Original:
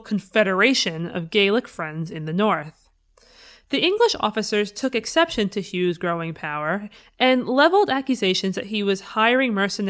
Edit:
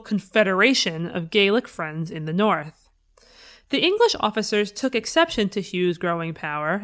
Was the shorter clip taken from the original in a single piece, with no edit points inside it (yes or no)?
yes